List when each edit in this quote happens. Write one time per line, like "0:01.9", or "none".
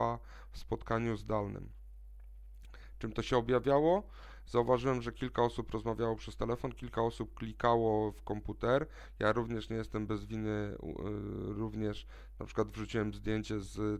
none